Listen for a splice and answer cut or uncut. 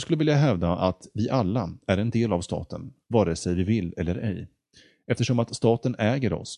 uncut